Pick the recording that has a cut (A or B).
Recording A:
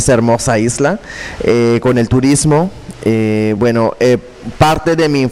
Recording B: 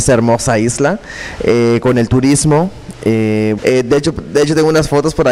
B